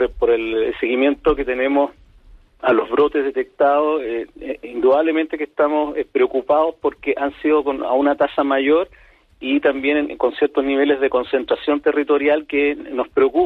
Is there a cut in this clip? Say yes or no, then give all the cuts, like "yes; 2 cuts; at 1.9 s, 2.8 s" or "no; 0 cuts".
no; 0 cuts